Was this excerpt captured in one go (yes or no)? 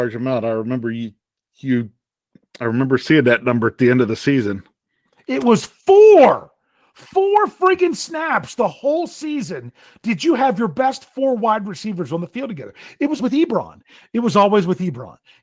no